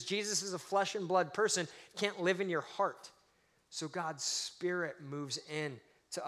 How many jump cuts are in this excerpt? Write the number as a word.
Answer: zero